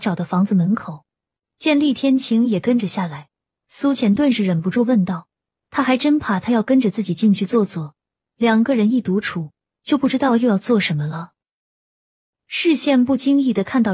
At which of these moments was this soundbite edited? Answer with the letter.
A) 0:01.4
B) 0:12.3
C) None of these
A